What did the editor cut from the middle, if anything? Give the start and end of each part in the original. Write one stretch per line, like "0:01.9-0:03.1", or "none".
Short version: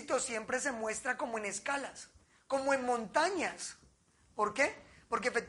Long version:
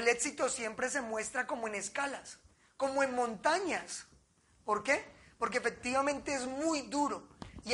none